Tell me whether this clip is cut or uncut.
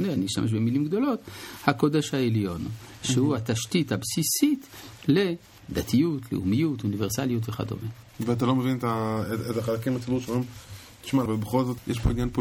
cut